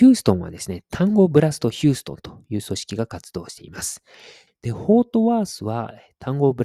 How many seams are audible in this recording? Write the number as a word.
one